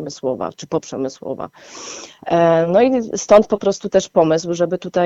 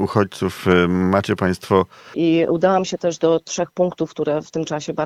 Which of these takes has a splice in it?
second; 1 cut; at 2.1 s

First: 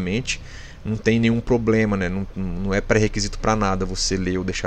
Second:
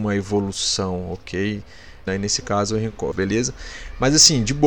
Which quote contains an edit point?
second; 2 cuts; at 2.1 s, 3.1 s

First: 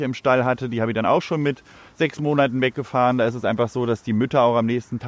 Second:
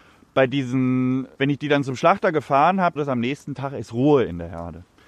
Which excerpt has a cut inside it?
second; 2 cuts; at 1.4 s, 3.0 s

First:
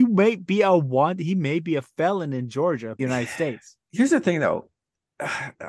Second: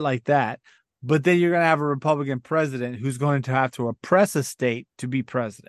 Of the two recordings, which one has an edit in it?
first; 1 cut; at 3.0 s

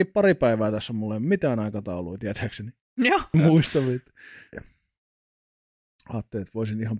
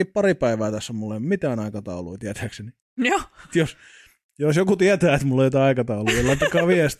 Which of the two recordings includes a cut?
first; 2 cuts; at 3.3 s, 4.5 s

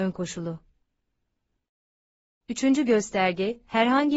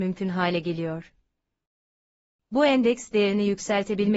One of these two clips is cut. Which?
first; 1 cut; at 2.4 s

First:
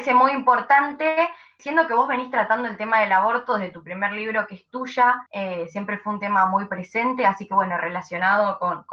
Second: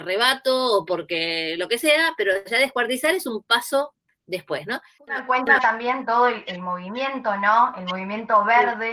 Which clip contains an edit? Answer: first; 2 cuts; at 1.6 s, 5.3 s

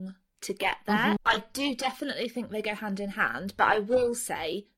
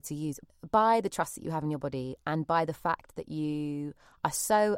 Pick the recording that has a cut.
first; 1 cut; at 1.2 s

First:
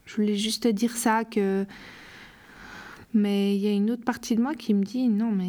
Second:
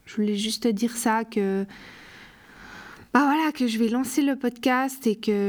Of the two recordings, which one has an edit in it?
first; 1 cut; at 3.0 s

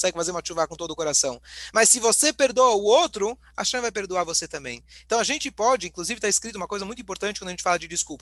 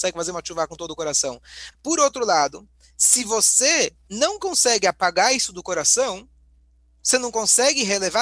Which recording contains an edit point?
second; 1 cut; at 1.7 s

